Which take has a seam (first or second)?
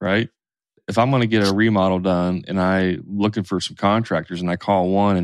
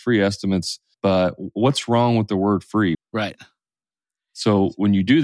second